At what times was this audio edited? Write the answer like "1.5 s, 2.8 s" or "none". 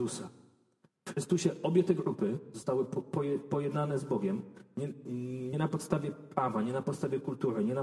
none